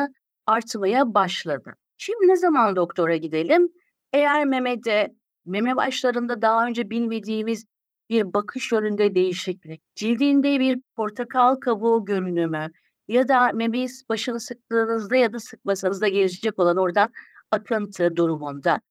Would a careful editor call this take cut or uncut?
cut